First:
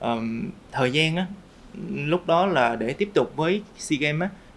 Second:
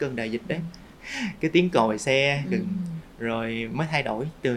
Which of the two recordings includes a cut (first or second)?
second